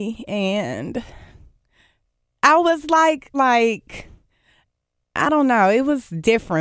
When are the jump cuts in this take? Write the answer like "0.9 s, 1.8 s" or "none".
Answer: 3.3 s

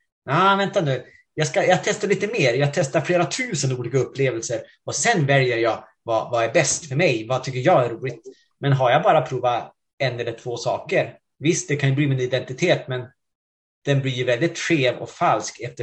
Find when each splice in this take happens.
none

